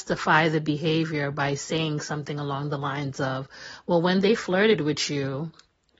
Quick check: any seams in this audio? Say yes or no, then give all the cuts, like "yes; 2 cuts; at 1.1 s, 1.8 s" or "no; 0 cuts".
no; 0 cuts